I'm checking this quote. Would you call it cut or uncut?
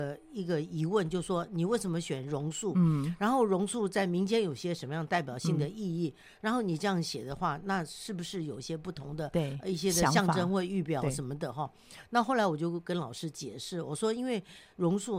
uncut